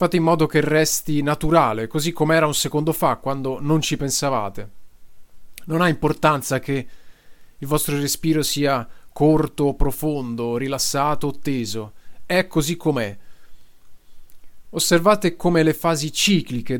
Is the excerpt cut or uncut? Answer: uncut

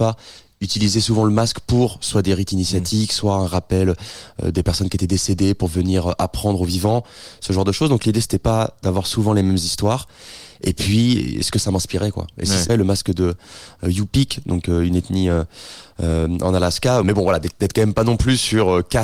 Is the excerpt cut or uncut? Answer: cut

